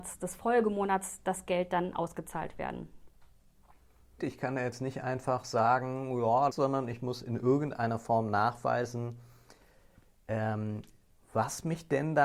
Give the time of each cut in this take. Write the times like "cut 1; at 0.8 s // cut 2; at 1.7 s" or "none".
cut 1; at 4.2 s // cut 2; at 6.5 s